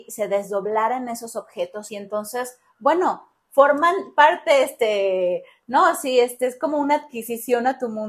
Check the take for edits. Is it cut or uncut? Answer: cut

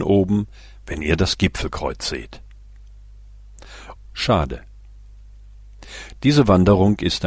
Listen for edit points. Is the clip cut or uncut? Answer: cut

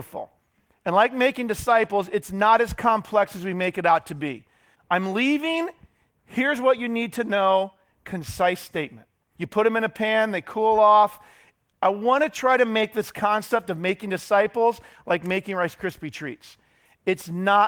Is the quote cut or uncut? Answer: cut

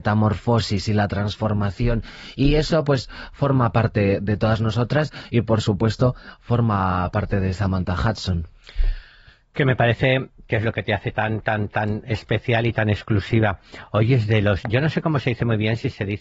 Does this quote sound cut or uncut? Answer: uncut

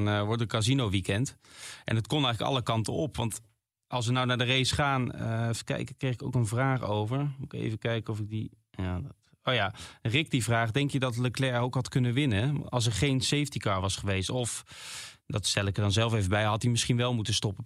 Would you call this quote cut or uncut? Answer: uncut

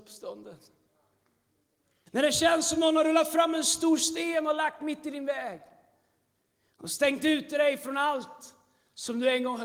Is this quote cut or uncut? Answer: cut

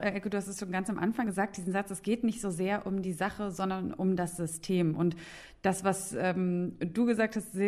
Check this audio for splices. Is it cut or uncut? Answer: cut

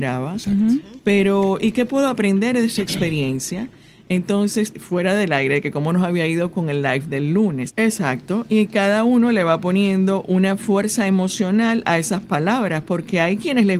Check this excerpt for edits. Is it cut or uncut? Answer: cut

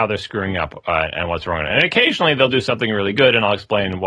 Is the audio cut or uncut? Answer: uncut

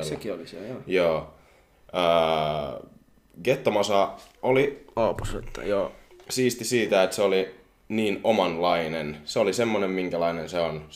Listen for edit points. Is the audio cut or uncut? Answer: uncut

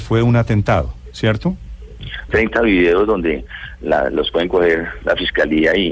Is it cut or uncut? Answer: cut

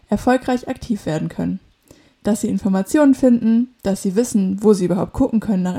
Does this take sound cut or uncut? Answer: uncut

